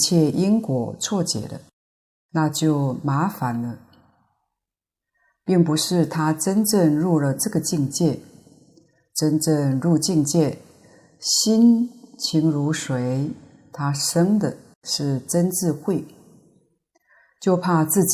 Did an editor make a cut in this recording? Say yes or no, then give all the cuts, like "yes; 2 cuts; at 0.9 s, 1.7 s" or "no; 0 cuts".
no; 0 cuts